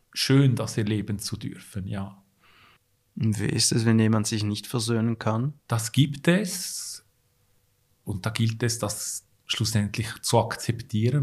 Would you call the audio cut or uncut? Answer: cut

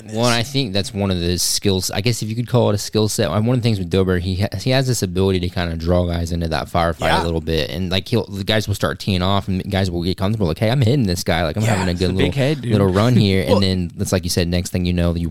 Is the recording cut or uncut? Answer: uncut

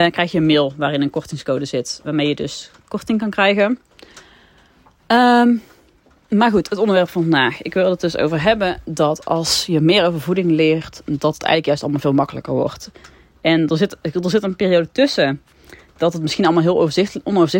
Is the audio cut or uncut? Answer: cut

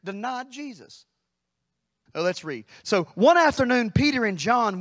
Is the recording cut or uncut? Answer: cut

